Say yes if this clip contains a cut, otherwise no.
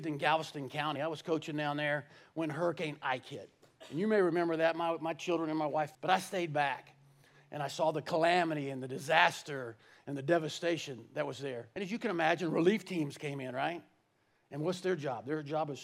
yes